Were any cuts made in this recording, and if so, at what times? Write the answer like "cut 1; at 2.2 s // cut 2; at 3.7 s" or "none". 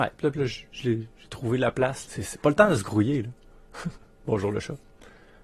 cut 1; at 2.1 s